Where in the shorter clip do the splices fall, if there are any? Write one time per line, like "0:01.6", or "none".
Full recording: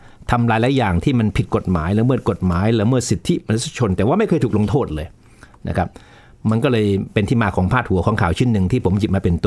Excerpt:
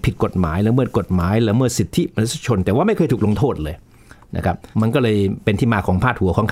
0:04.7